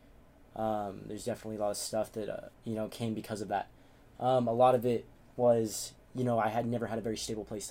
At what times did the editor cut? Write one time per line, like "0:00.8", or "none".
0:02.5